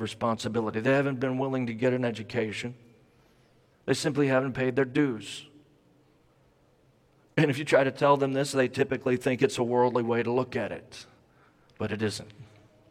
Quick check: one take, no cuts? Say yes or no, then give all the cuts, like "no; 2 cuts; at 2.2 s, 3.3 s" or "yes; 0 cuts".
no; 1 cut; at 3.7 s